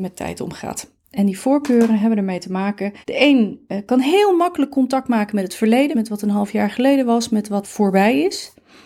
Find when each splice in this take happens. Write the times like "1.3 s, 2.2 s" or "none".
3.0 s, 5.9 s, 7.6 s